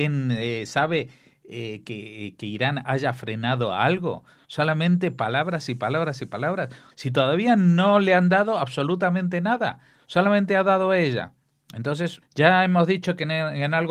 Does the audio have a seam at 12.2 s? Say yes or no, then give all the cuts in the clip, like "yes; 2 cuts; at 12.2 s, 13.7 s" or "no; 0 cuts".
yes; 2 cuts; at 6.9 s, 12.2 s